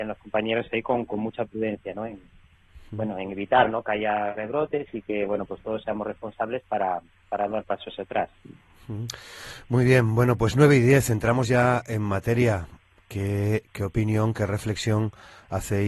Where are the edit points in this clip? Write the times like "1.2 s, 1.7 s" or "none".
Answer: none